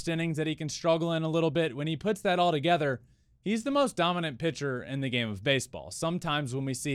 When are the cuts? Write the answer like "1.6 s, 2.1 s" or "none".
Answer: none